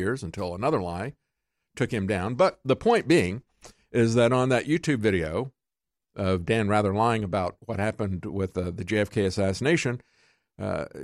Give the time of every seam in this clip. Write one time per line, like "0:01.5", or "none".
none